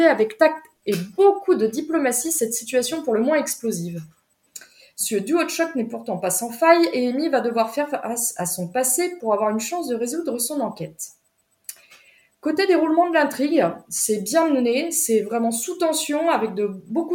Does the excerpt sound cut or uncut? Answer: uncut